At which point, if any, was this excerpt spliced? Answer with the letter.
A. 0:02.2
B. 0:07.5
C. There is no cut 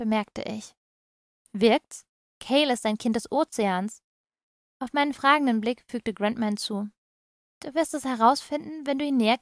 A